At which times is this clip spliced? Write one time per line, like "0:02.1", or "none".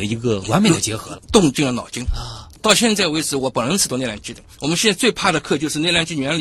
none